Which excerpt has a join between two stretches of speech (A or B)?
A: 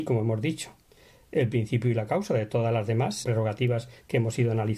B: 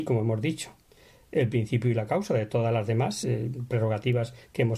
A